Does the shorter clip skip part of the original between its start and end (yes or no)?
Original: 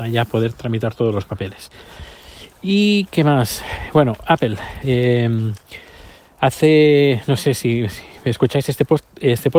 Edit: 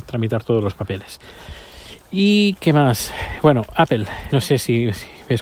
yes